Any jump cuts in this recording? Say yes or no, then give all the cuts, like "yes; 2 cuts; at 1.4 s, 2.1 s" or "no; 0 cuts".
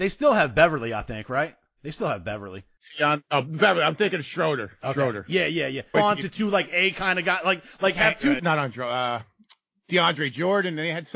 yes; 2 cuts; at 5.9 s, 8.4 s